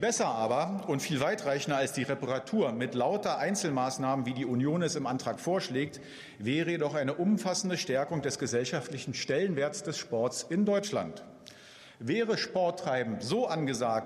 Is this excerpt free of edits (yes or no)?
yes